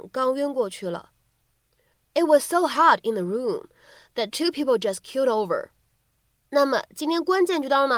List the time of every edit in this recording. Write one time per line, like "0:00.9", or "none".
none